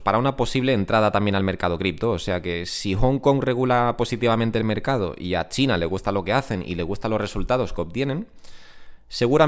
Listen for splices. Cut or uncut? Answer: uncut